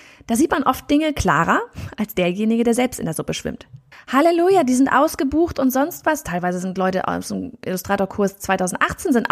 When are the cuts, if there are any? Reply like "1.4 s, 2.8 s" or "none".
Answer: 3.9 s